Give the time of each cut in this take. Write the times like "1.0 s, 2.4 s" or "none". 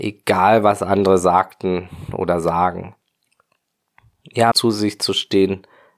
4.5 s